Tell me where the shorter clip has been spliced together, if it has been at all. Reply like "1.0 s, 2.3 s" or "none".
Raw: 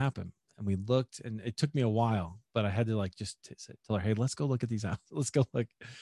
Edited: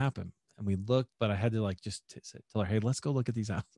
1.1 s